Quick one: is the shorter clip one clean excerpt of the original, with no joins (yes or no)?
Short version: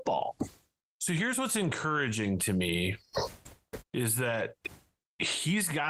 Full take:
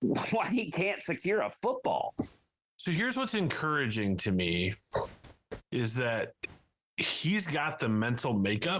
yes